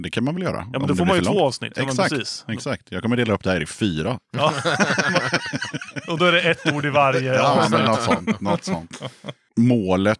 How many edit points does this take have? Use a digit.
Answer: 0